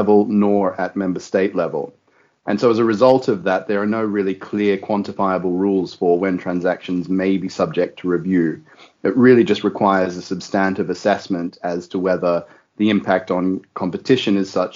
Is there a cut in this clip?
no; 0 cuts

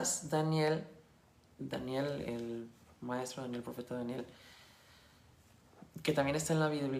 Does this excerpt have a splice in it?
no; 0 cuts

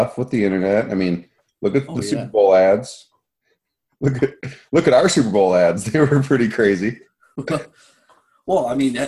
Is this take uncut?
yes; 0 cuts

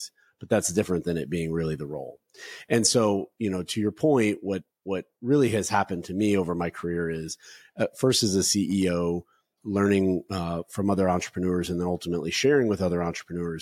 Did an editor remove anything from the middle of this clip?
yes; 1 cut; at 9.6 s

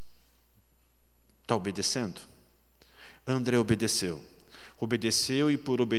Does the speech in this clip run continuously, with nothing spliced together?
yes; 0 cuts

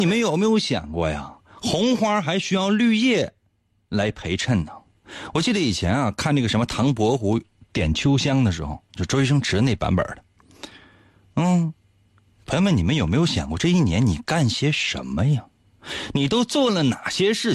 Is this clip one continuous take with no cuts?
no; 1 cut; at 12.3 s

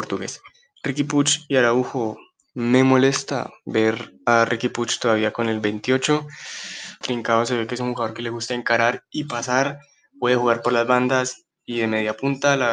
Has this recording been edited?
yes; 1 cut; at 7.0 s

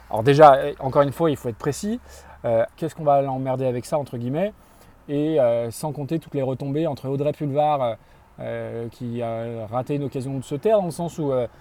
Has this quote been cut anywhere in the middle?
yes; 1 cut; at 2.7 s

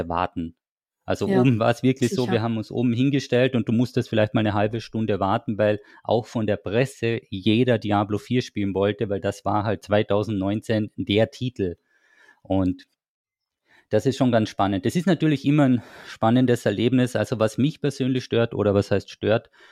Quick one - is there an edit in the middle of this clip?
no; 0 cuts

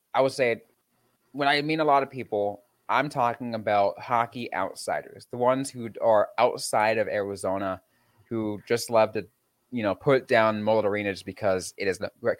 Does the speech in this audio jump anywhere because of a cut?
no; 0 cuts

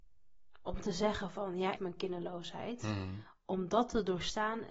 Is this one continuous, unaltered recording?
no; 1 cut; at 1.8 s

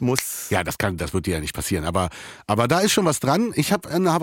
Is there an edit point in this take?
no; 0 cuts

